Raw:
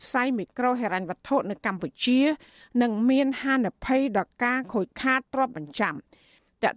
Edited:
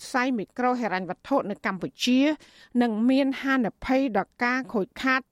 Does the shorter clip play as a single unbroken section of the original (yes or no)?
yes